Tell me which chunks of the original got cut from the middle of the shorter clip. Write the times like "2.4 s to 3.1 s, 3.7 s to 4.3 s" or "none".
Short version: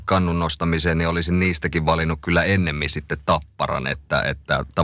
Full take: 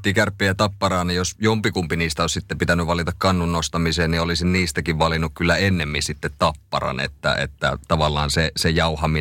none